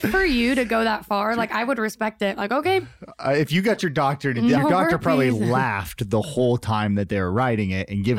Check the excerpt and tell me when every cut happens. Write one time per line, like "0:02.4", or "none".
0:04.6